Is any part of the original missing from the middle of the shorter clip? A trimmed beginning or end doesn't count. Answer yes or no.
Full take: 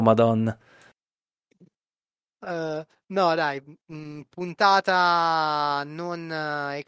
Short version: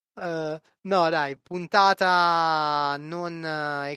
yes